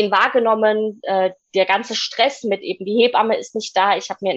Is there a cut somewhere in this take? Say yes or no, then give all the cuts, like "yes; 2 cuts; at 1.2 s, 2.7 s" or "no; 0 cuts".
no; 0 cuts